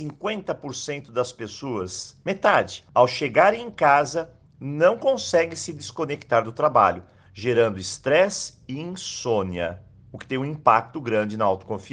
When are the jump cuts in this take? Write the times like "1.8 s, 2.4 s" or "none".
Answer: 2.9 s, 10.9 s